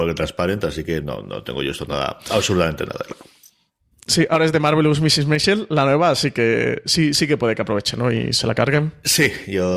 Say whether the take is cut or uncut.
uncut